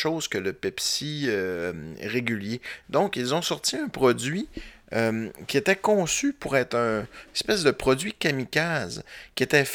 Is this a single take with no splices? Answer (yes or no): no